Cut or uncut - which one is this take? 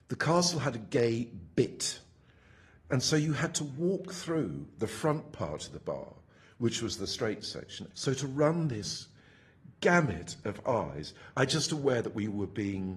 cut